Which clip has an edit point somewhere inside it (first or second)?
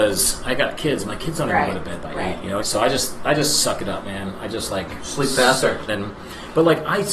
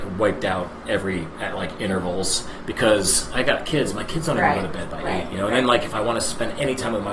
first